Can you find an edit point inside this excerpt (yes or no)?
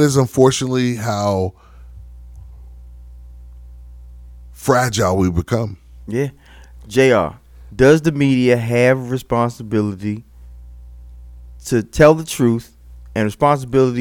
no